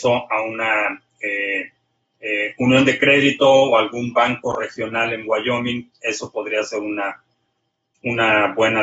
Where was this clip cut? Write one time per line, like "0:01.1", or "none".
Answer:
none